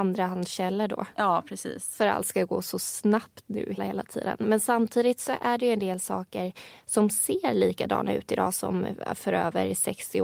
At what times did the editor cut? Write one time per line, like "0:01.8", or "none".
0:03.8